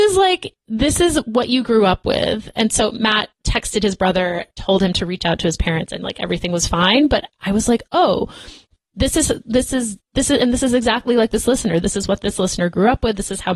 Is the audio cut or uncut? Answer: uncut